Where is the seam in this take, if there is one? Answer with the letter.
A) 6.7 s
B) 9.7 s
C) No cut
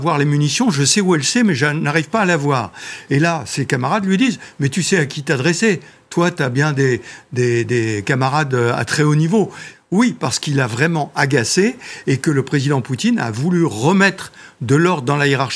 B